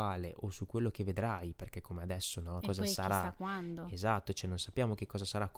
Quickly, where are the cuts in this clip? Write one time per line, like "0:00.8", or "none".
0:02.6